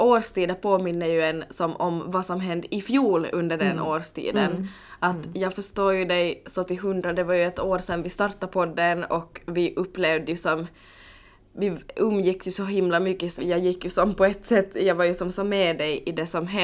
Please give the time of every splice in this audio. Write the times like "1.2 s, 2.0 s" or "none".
13.4 s